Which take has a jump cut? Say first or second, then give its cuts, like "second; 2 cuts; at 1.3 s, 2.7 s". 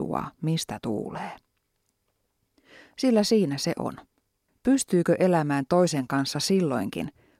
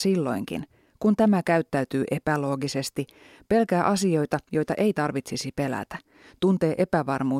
first; 1 cut; at 4.5 s